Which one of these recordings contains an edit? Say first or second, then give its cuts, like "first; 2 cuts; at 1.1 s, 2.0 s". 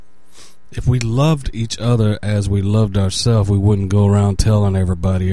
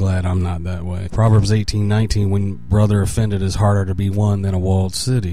second; 1 cut; at 1.1 s